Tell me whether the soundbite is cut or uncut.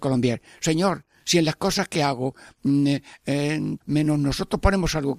cut